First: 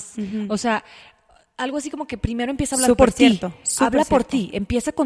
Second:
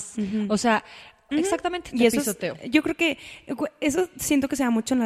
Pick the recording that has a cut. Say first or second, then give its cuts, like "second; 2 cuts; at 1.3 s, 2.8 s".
second; 1 cut; at 1.3 s